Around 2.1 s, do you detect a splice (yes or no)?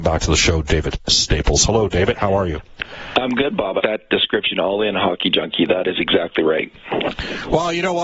no